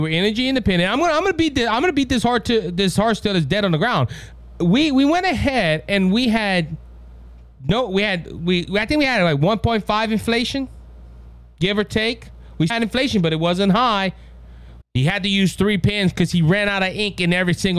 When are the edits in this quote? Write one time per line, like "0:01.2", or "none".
0:12.7
0:14.8